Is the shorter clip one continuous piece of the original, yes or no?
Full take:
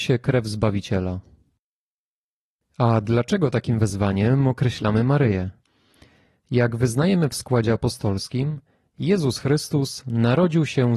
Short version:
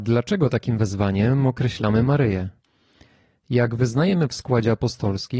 yes